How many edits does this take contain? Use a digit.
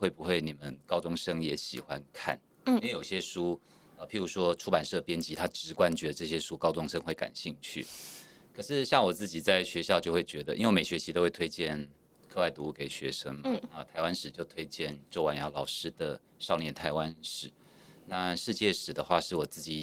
0